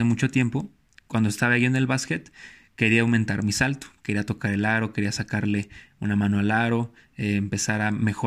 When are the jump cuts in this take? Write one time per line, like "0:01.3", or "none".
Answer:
none